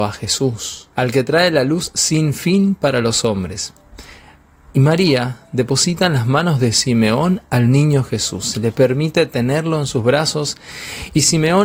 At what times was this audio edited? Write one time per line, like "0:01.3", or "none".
0:00.9